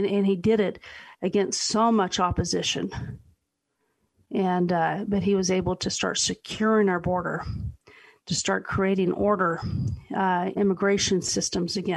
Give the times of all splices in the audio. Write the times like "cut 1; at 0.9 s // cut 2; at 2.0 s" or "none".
cut 1; at 10.5 s

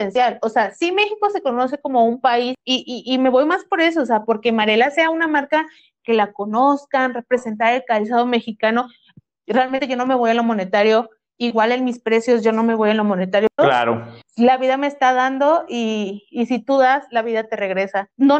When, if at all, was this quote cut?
cut 1; at 13.6 s

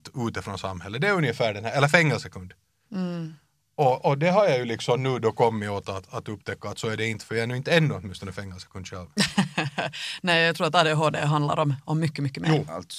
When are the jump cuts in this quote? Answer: none

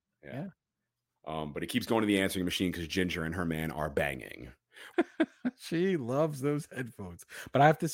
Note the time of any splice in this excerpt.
cut 1; at 4.9 s

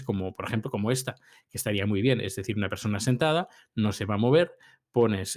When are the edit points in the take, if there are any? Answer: none

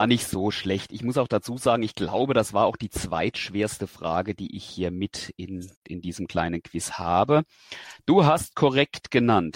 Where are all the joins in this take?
cut 1; at 5.7 s

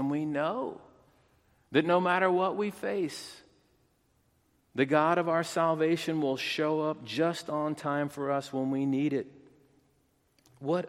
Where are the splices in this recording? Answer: none

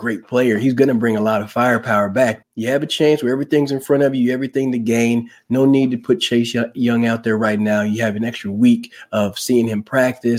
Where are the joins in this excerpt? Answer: cut 1; at 2.4 s

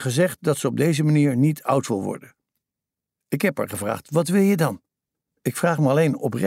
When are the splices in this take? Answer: cut 1; at 5.3 s

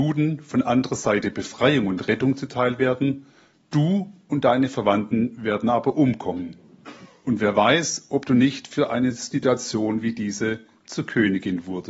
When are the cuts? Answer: none

